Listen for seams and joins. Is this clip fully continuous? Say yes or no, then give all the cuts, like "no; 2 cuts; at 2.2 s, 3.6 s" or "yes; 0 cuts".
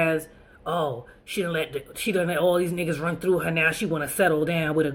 yes; 0 cuts